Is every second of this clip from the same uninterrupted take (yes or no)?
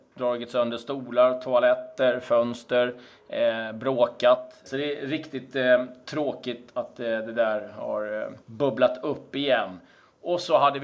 no